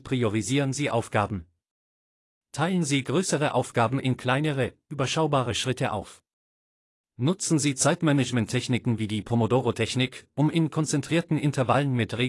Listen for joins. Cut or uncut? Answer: uncut